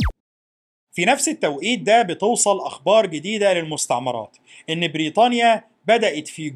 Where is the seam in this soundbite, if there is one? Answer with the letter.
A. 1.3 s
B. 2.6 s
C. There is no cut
C